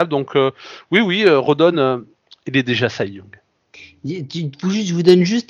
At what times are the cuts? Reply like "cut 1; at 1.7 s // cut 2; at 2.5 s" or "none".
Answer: none